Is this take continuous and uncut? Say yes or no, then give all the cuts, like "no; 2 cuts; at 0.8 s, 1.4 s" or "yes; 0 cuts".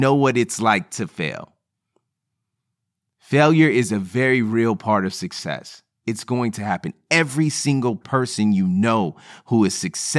yes; 0 cuts